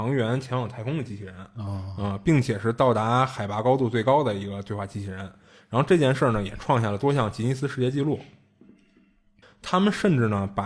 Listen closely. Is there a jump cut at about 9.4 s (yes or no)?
yes